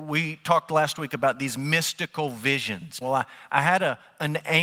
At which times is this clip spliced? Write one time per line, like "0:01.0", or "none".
0:03.0